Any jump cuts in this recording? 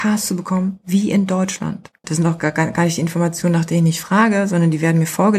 yes; 1 cut; at 2.0 s

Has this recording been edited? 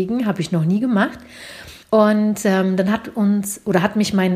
yes; 1 cut; at 1.8 s

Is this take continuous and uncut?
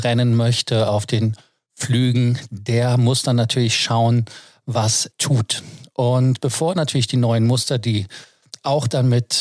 no; 1 cut; at 5.1 s

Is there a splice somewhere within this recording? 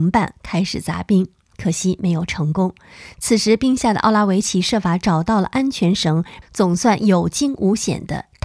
yes; 1 cut; at 6.4 s

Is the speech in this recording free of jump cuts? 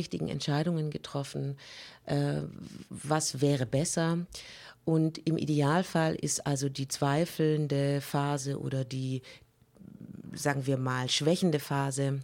yes; 0 cuts

